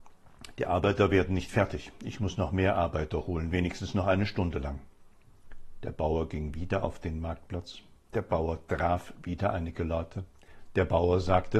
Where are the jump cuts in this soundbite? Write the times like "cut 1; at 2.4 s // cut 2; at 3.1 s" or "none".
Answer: none